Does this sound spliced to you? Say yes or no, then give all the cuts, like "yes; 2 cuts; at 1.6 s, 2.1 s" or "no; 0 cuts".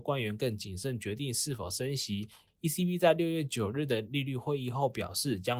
yes; 1 cut; at 2.5 s